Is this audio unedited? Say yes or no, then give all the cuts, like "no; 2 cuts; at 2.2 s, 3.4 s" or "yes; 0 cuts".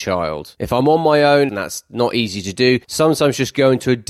no; 1 cut; at 1.5 s